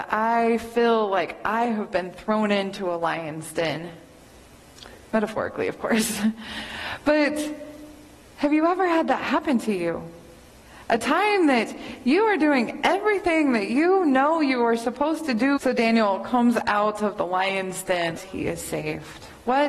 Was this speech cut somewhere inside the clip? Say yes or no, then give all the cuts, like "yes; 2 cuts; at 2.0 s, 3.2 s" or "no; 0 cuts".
yes; 2 cuts; at 15.6 s, 18.2 s